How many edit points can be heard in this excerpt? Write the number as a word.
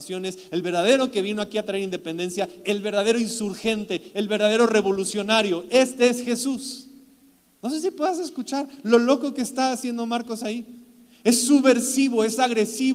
zero